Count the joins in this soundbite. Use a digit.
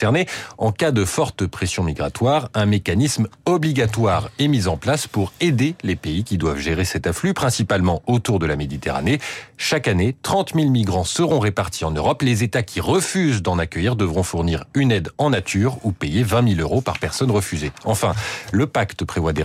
0